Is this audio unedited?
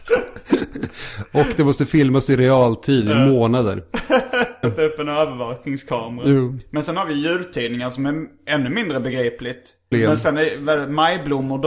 no; 2 cuts; at 4.6 s, 9.9 s

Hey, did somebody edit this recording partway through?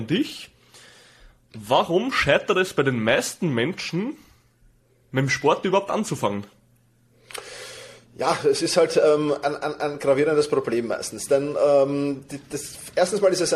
no; 0 cuts

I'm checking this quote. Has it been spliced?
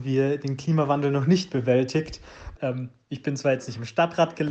yes; 1 cut; at 2.6 s

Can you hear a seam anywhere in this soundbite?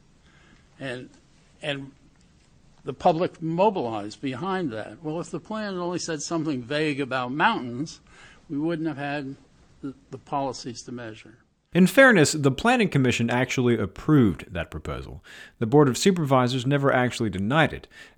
no; 0 cuts

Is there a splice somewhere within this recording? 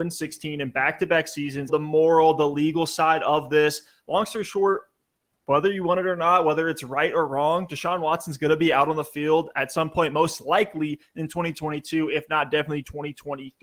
yes; 1 cut; at 1.7 s

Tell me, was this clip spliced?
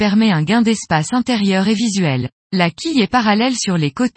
yes; 1 cut; at 2.4 s

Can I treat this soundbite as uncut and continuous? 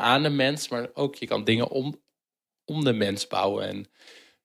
yes; 0 cuts

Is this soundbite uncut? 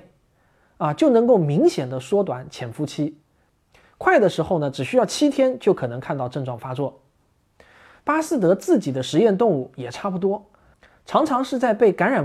no; 1 cut; at 8.0 s

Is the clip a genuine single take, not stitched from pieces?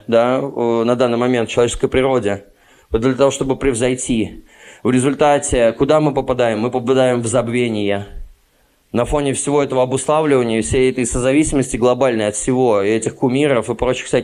yes; 0 cuts

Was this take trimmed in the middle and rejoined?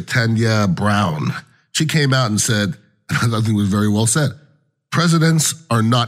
no; 0 cuts

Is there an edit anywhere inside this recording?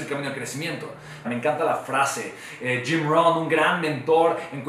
yes; 1 cut; at 1.2 s

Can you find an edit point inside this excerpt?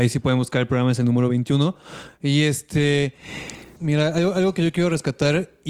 yes; 1 cut; at 3.8 s

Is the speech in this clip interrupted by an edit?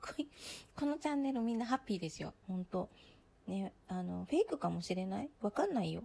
yes; 1 cut; at 2.4 s

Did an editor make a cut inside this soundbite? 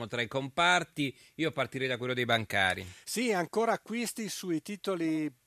no; 0 cuts

